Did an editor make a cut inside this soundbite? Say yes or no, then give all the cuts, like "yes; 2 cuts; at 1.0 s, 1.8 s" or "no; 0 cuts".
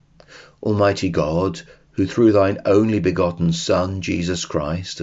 no; 0 cuts